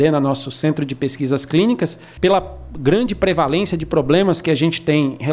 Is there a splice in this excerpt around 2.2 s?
yes; 1 cut; at 2.2 s

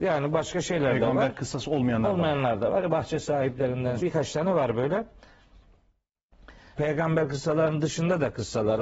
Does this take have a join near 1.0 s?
no; 2 cuts; at 4.0 s, 6.8 s

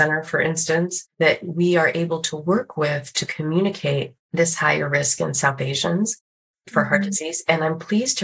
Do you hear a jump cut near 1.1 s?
yes; 1 cut; at 1.1 s

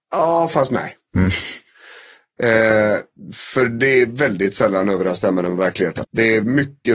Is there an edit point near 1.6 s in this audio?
no; 1 cut; at 6.0 s

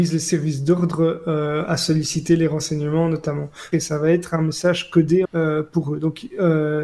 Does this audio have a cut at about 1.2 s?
no; 2 cuts; at 3.7 s, 5.3 s

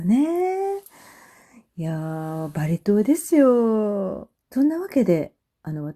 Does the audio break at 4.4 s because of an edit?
yes; 1 cut; at 4.4 s

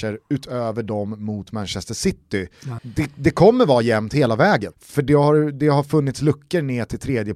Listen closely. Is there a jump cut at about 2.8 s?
yes; 2 cuts; at 2.8 s, 4.7 s

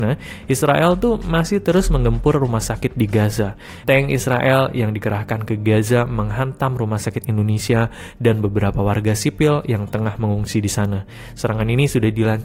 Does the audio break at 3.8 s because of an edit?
yes; 1 cut; at 3.8 s

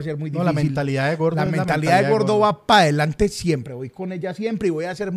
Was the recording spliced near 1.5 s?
no; 0 cuts

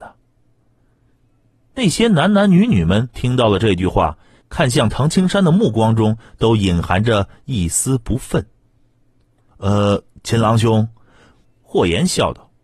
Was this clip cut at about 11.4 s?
yes; 2 cuts; at 9.5 s, 11.4 s

